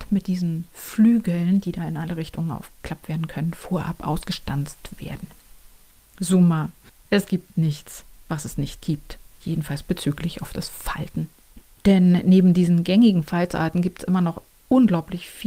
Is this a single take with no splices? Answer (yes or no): yes